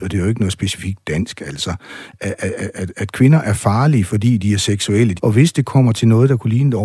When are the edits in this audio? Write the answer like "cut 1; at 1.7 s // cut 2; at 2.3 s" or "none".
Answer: cut 1; at 5.2 s